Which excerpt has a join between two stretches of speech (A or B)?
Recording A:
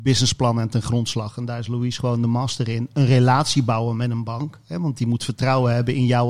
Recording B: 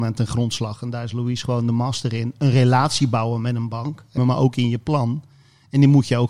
B